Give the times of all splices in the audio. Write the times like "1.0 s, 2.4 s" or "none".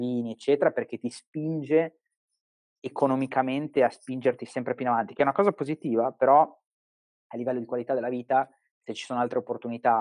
none